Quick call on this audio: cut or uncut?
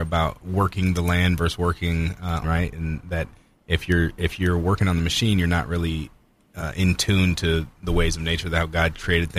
cut